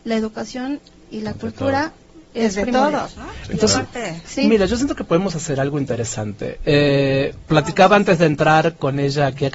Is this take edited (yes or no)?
no